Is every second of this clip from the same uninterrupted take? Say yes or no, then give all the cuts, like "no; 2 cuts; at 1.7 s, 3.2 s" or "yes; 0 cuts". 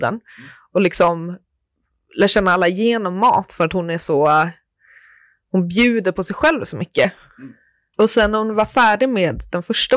no; 1 cut; at 7.9 s